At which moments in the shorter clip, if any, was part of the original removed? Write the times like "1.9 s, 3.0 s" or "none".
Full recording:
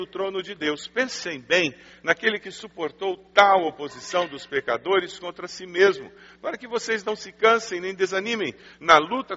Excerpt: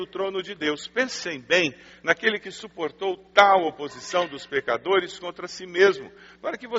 none